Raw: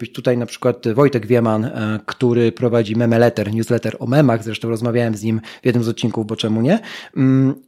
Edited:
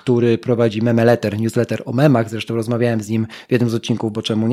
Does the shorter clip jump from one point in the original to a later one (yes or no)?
no